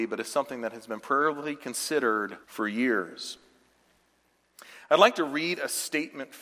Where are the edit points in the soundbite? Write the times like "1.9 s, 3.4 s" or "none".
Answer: 2.4 s